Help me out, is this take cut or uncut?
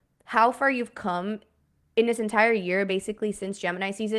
uncut